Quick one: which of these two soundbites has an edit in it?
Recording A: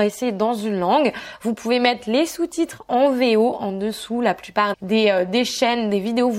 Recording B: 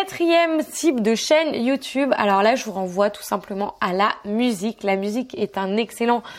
A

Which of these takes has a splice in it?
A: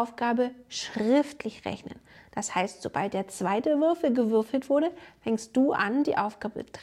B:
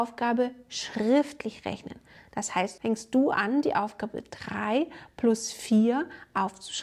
B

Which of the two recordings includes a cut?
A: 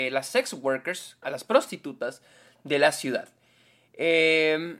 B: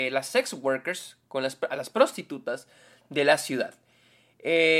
A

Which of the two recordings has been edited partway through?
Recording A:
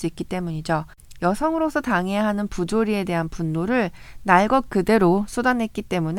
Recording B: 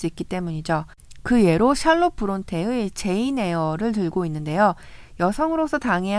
A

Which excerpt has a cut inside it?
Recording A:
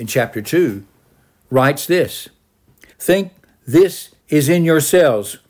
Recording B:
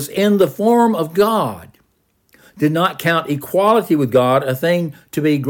A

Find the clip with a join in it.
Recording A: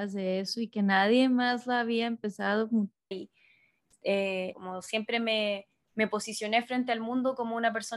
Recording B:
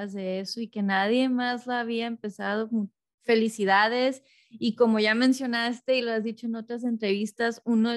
A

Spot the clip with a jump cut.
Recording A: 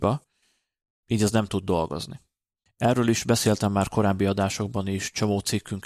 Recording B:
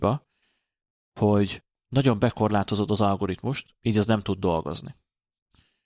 A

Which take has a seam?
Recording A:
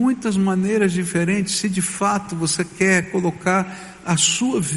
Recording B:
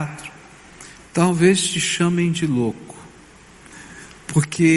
B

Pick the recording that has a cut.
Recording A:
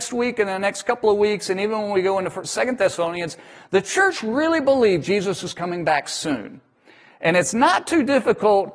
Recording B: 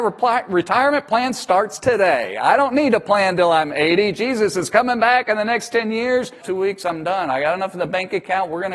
B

